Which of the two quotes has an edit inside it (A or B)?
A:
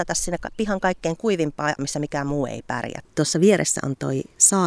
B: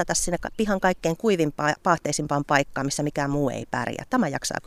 A